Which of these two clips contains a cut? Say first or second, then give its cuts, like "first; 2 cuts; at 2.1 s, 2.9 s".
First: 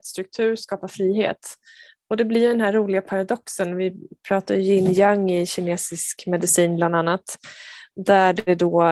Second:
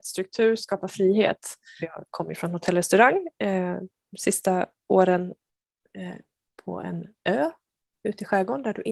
second; 1 cut; at 1.8 s